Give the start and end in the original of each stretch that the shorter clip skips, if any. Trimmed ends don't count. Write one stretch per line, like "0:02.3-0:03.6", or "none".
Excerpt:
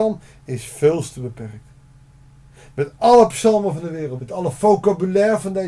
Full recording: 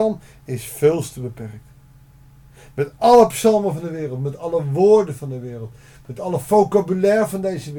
0:04.2-0:06.0

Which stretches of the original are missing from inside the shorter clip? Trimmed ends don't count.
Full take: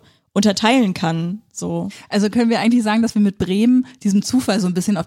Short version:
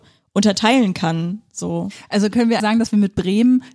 0:02.6-0:02.8

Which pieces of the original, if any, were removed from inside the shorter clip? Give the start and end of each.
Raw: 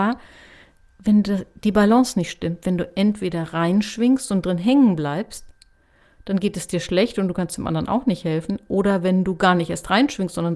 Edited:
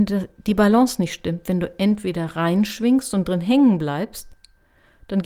none

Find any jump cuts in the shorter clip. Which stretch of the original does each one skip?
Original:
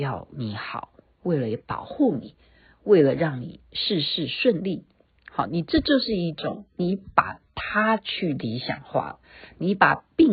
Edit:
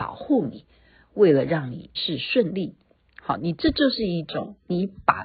0:03.6-0:04.0

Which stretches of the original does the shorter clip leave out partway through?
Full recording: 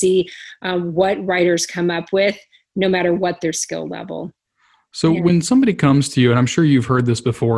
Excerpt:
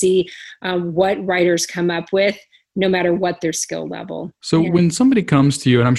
0:04.4-0:04.9

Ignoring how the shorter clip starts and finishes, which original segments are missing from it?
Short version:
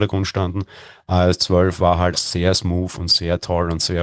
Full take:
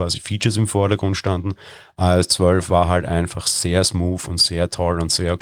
0:03.0-0:03.4

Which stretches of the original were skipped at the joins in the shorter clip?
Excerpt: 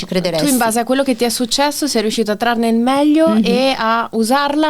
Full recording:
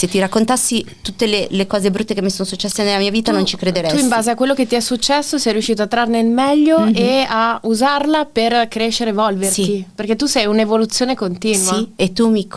none

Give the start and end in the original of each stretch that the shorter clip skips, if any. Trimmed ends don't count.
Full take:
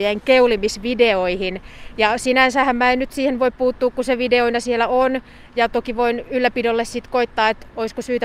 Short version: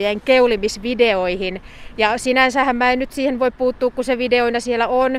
none

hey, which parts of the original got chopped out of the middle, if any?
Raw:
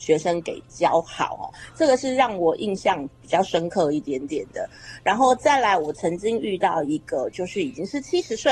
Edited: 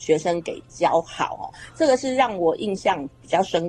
none

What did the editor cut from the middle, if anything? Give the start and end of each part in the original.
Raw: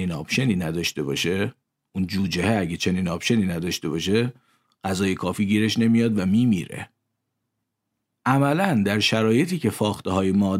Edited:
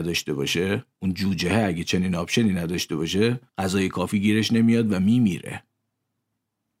0:01.6-0:01.9
0:04.4-0:04.7

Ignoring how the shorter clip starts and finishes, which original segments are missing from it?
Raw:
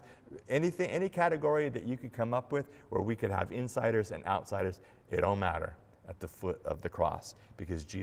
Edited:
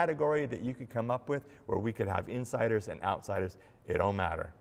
none

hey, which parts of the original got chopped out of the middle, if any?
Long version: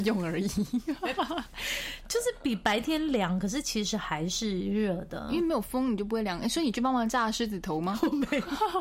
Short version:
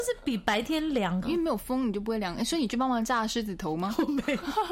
0:03.4-0:05.3

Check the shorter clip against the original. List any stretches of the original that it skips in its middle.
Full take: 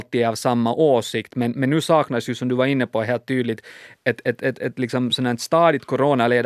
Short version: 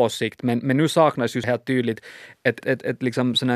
0:02.4-0:03.0
0:04.2-0:04.4

